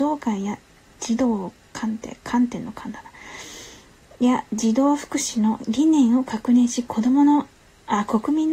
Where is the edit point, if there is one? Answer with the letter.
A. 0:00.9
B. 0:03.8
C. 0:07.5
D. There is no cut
D